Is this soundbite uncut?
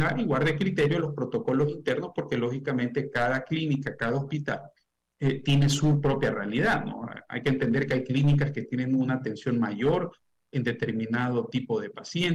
yes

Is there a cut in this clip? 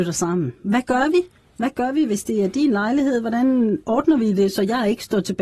no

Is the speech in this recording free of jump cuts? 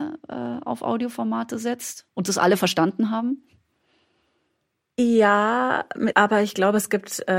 no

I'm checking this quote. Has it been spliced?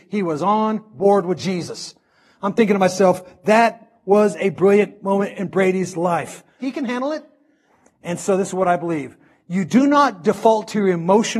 yes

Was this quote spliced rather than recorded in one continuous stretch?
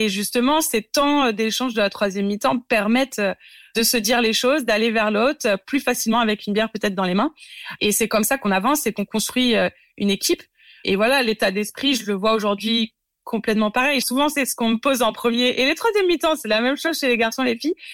yes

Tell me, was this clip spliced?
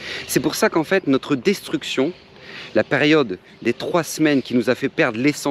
no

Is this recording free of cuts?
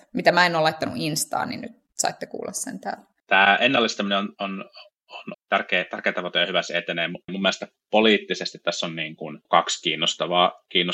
no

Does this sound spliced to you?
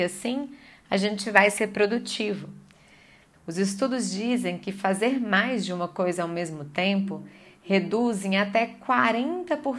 yes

